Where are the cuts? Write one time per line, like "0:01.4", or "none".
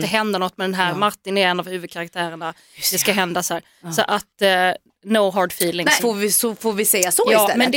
0:06.0